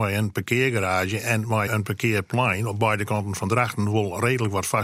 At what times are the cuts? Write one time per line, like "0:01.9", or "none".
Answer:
0:01.7